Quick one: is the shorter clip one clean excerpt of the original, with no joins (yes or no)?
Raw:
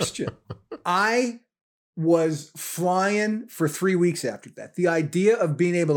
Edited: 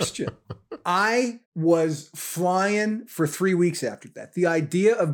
no